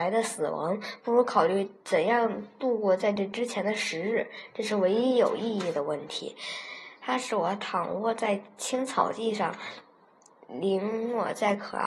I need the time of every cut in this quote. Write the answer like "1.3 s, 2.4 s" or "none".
7.0 s

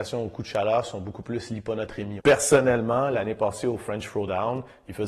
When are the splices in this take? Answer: 2.2 s

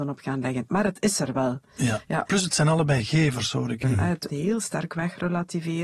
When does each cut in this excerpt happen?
2.3 s, 3.8 s

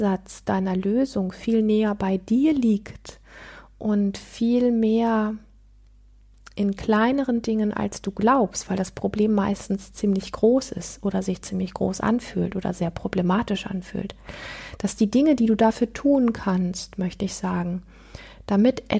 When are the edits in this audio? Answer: none

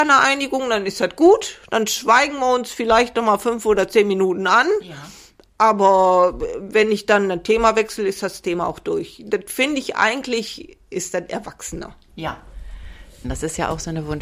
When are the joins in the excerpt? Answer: 13.2 s

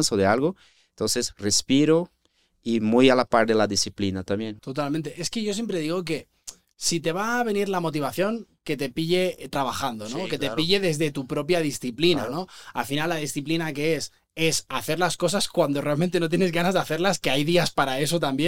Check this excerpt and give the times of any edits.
4.6 s

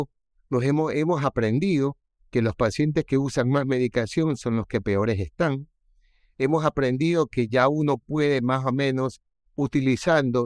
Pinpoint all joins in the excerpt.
none

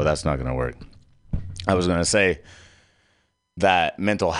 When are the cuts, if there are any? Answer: none

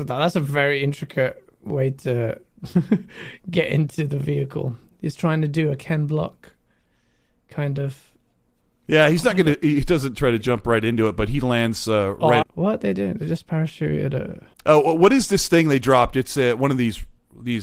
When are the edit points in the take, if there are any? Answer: 12.4 s, 14.5 s

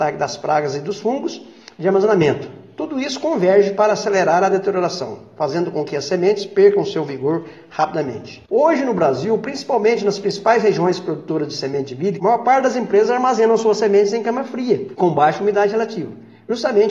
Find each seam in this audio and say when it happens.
12.2 s

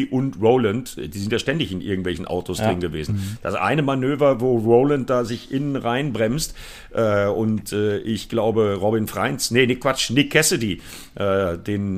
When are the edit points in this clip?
none

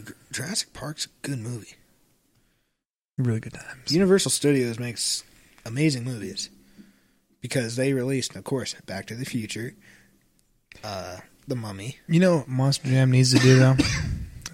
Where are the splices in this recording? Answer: none

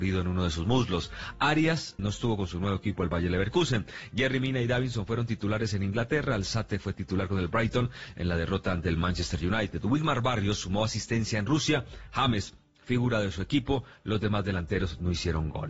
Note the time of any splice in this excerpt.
2.0 s

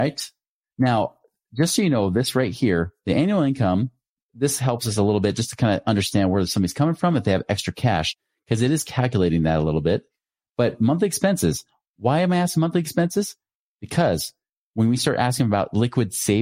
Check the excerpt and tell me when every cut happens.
none

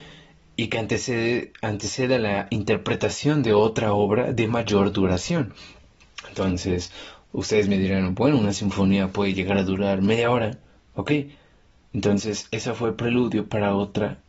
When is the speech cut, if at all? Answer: none

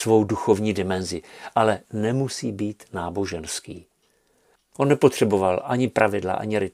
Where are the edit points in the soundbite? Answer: 4.6 s

